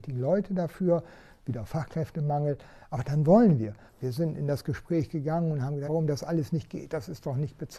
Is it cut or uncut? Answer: cut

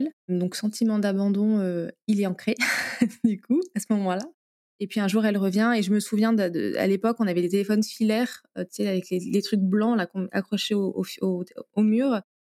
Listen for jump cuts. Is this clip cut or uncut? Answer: uncut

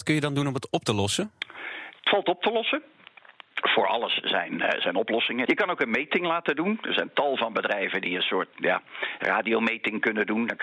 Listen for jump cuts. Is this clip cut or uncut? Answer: cut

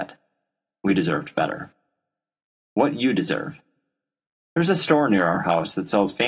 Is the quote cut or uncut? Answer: uncut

